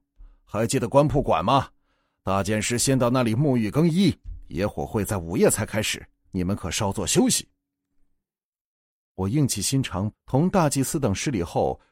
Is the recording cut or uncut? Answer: cut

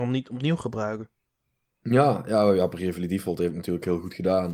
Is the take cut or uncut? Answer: uncut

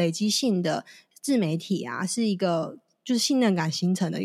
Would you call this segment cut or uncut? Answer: uncut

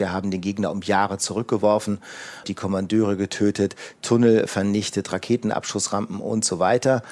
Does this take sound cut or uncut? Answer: cut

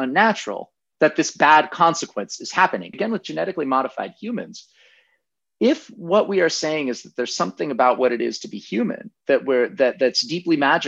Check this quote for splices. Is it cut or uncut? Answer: cut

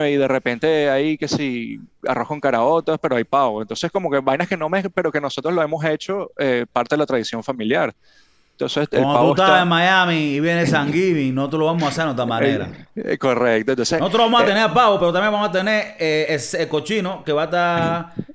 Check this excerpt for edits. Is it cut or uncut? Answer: uncut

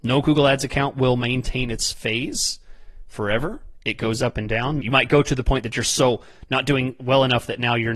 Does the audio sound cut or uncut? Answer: cut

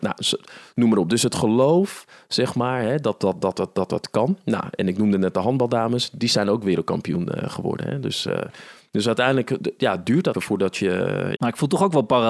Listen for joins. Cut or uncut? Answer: cut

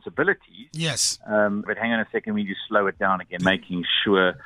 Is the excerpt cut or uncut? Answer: cut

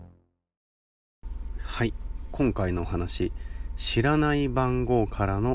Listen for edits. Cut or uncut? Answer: uncut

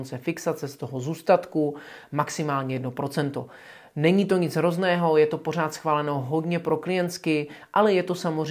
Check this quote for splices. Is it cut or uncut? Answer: uncut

